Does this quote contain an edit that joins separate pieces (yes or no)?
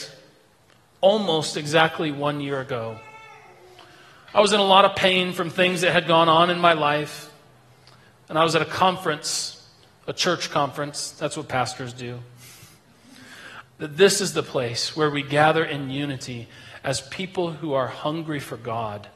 yes